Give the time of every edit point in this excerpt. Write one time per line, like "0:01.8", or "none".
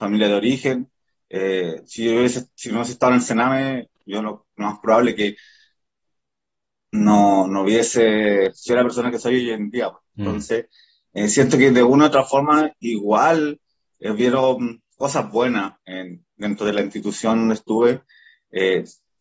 none